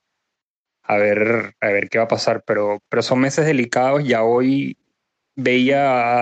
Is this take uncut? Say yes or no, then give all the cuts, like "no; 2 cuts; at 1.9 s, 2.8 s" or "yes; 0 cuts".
yes; 0 cuts